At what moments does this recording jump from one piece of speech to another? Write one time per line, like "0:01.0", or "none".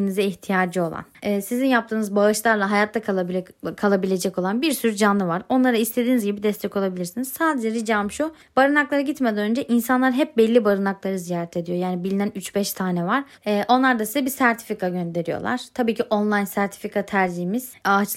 0:13.4